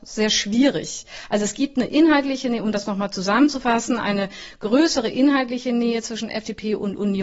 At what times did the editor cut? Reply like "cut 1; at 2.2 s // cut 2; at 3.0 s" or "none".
none